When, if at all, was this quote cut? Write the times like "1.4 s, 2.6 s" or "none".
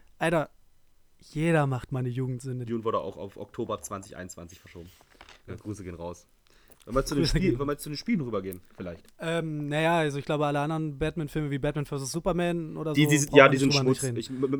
2.7 s, 5.5 s